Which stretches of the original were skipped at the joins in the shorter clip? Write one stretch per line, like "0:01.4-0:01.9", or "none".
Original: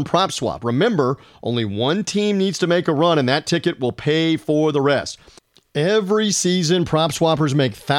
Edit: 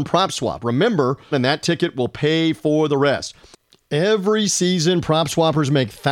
0:01.3-0:03.2